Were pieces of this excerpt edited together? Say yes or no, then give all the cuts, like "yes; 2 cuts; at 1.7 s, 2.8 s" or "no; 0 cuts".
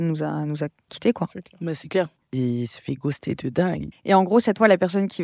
yes; 2 cuts; at 2.2 s, 3.9 s